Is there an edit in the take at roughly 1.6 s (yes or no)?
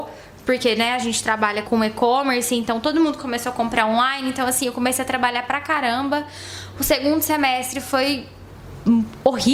yes